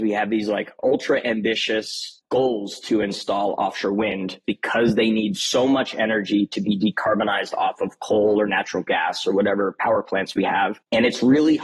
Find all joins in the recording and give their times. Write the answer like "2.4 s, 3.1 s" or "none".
4.4 s